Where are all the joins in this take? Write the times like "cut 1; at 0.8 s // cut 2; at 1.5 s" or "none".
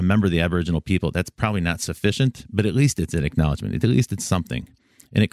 none